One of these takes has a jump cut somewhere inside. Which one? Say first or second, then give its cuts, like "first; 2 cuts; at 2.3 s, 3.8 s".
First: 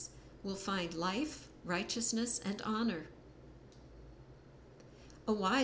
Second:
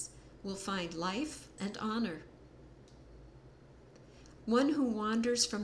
second; 2 cuts; at 1.6 s, 4.4 s